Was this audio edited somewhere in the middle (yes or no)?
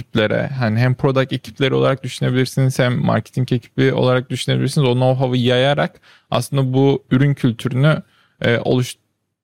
no